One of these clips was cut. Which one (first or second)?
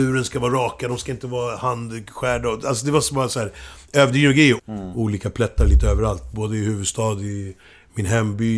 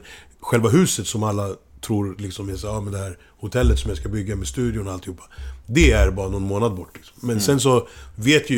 first